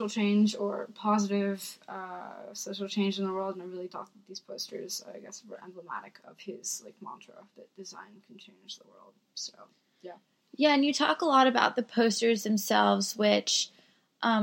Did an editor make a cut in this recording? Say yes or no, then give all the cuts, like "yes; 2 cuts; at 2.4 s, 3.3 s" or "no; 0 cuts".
no; 0 cuts